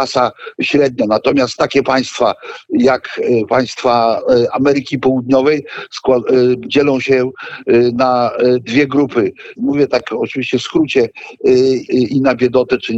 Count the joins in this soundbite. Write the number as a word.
two